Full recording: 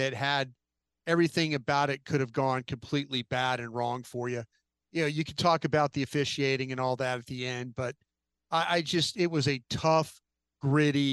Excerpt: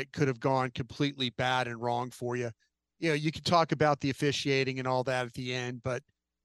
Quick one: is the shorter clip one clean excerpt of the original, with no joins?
yes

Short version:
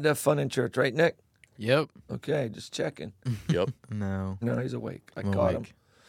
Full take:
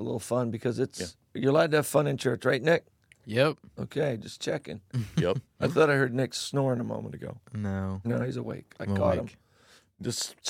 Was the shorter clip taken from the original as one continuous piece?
no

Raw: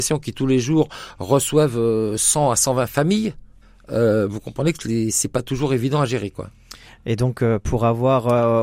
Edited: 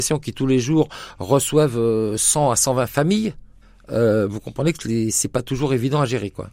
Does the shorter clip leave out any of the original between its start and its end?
no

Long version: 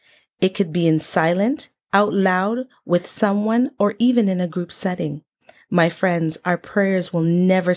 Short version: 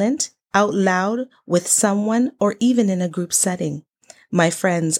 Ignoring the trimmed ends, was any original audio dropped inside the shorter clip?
no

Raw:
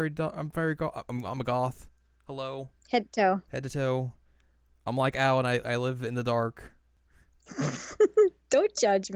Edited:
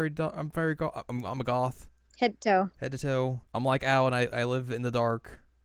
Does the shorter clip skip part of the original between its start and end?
yes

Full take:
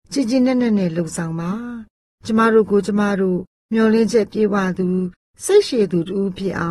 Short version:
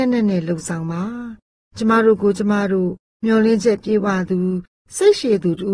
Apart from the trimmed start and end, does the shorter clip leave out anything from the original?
no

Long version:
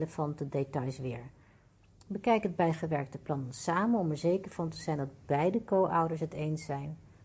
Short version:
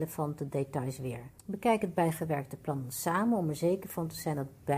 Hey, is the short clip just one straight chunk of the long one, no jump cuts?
no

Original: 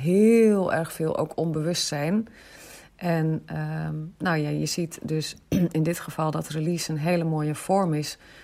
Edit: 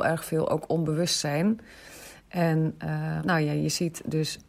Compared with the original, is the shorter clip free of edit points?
no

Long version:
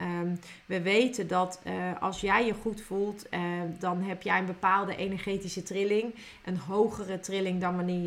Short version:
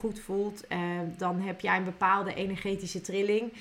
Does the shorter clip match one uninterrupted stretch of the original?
yes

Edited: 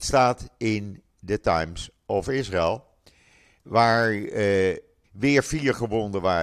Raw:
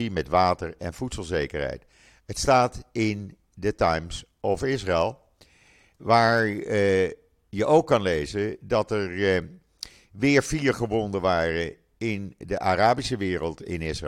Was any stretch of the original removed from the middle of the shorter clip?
yes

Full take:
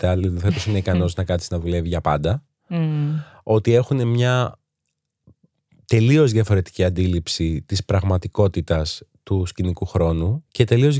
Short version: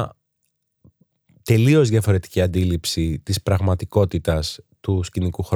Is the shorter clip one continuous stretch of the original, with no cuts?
yes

